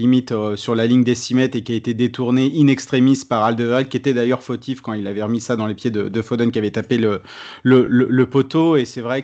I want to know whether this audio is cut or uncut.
uncut